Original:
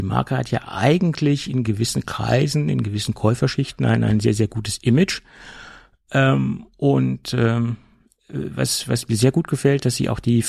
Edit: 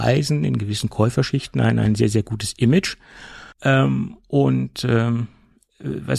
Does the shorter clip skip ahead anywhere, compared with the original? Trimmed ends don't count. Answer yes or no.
yes